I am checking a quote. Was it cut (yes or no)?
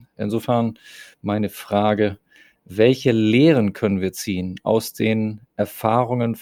no